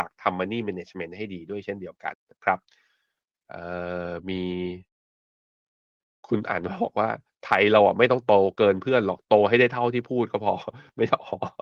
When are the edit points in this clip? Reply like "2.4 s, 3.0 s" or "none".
2.1 s